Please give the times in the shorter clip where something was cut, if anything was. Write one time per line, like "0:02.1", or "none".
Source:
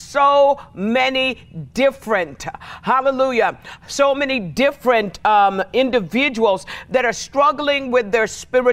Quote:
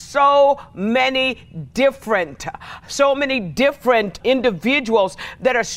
0:02.8
0:04.2